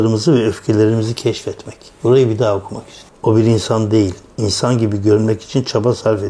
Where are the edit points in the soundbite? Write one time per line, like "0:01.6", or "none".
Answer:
0:02.0
0:03.1

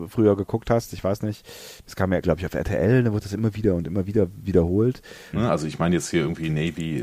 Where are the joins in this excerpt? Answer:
0:02.2
0:05.3

